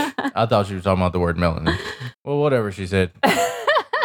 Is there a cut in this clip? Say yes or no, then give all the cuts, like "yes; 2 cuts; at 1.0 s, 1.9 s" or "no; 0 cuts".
yes; 1 cut; at 2.1 s